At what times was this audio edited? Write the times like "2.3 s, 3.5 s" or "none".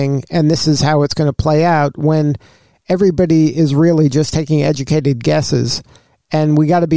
none